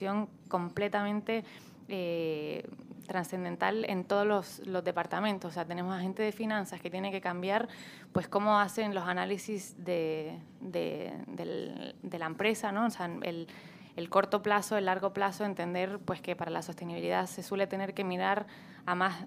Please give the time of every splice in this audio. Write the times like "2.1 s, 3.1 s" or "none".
none